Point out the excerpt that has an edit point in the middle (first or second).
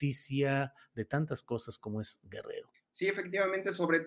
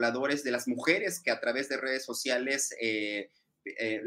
first